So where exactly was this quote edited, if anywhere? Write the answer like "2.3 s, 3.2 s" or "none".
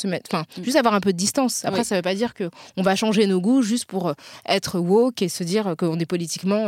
none